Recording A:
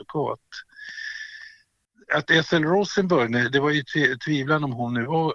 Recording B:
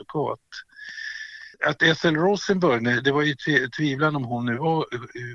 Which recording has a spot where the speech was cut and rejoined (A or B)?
B